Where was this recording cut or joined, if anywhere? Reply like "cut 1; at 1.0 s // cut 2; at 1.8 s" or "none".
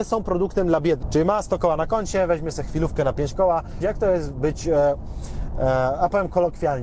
cut 1; at 1.0 s // cut 2; at 3.8 s